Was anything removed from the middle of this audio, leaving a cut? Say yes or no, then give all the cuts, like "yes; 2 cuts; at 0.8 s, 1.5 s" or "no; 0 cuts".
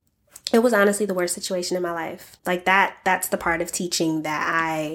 yes; 1 cut; at 2.4 s